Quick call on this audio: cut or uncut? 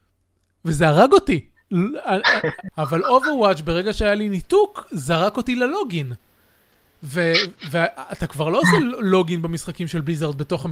cut